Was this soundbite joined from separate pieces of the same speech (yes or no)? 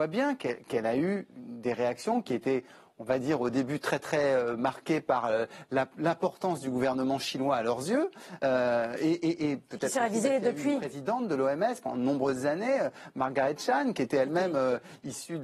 no